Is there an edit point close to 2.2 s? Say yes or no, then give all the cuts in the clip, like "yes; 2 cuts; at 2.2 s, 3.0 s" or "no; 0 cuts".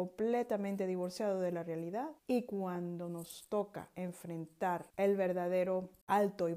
yes; 2 cuts; at 2.2 s, 4.9 s